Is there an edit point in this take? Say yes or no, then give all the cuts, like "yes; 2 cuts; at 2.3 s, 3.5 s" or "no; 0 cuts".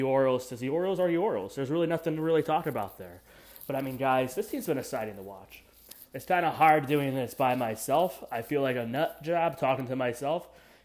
no; 0 cuts